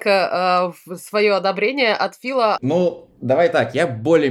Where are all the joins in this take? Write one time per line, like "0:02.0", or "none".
0:02.6